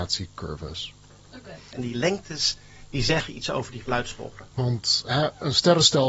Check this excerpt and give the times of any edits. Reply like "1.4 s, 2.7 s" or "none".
1.7 s, 4.5 s

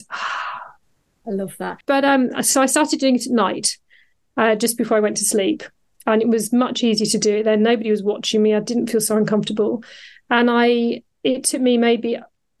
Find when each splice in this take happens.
1.8 s

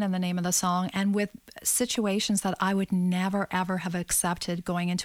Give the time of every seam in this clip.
none

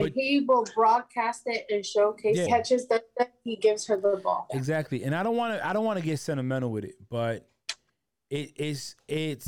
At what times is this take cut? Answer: 2.5 s, 4.5 s

